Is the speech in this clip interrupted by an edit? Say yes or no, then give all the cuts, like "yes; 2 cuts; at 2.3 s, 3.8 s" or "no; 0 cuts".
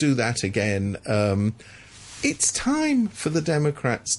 no; 0 cuts